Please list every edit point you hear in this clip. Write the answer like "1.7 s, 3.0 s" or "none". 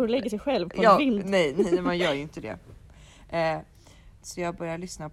4.2 s